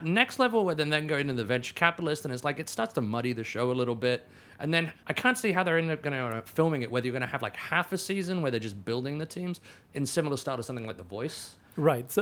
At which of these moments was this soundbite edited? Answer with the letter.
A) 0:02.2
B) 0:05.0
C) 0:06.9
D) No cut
B